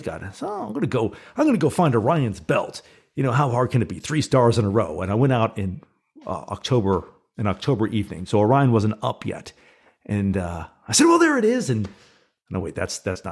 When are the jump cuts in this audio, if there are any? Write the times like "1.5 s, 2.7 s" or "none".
none

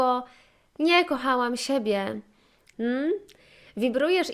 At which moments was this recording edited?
2.7 s

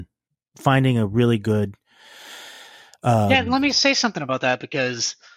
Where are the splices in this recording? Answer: none

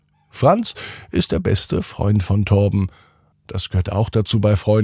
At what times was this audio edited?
3.3 s

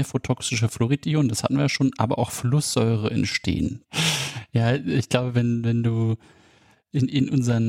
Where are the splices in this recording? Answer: 3.8 s

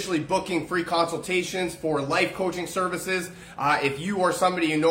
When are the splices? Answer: none

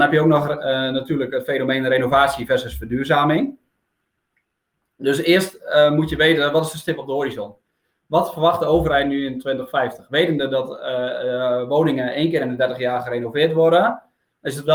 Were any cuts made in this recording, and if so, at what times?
none

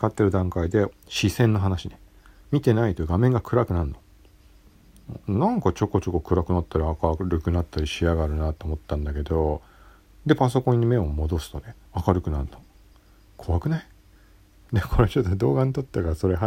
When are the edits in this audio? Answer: 0.9 s, 11.9 s

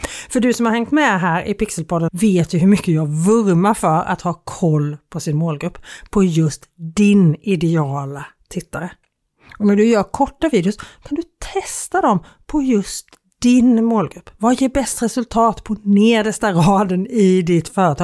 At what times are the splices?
2.1 s

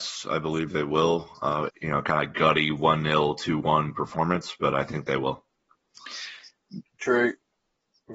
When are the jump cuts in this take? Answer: 1.7 s, 6.8 s

